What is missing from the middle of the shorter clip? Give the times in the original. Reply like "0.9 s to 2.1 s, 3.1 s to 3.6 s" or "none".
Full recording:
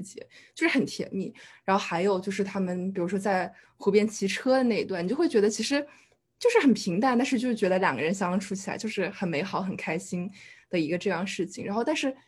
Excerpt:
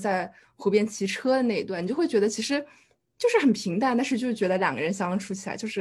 none